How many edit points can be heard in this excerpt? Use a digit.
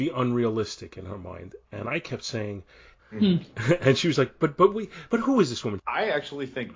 2